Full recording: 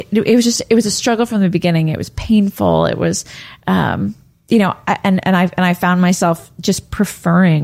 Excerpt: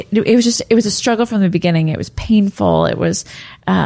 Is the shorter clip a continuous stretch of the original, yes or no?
yes